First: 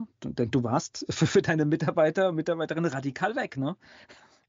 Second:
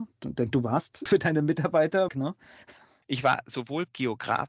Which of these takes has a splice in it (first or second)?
second